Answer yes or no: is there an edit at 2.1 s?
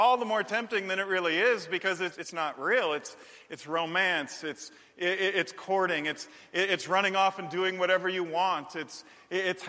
yes